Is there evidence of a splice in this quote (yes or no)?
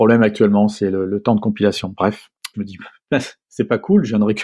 yes